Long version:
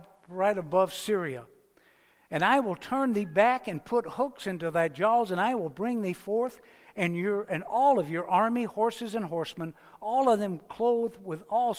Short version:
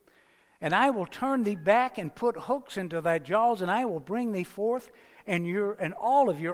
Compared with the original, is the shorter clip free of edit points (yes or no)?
yes